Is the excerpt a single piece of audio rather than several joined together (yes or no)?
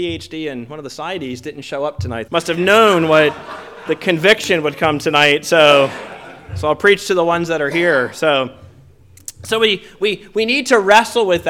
no